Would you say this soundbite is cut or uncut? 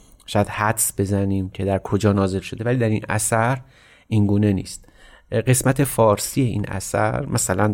uncut